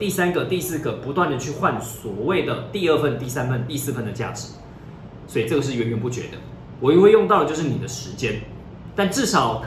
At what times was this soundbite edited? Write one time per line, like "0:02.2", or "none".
none